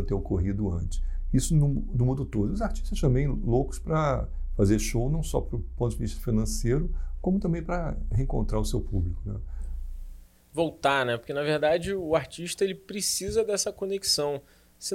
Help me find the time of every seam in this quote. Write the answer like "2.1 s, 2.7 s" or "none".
none